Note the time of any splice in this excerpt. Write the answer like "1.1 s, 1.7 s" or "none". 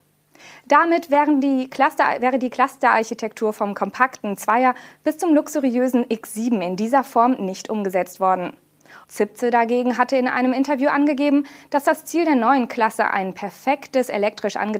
9.0 s